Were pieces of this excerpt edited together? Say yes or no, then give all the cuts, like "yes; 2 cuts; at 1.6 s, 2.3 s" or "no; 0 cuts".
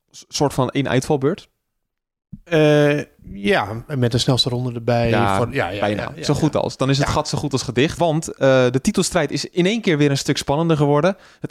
yes; 1 cut; at 8.0 s